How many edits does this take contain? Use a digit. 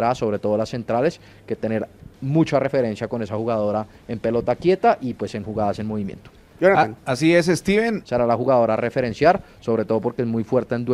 2